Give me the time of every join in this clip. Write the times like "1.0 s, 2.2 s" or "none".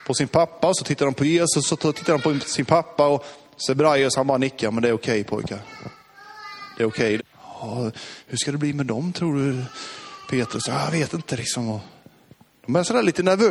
7.2 s